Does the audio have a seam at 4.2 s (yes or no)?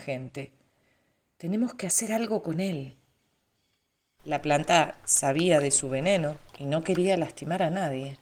yes